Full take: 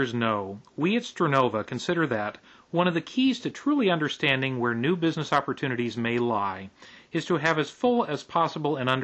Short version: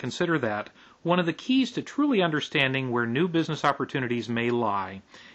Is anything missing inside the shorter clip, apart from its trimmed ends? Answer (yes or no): no